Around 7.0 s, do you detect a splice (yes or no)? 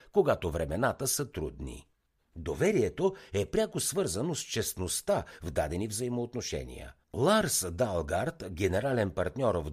no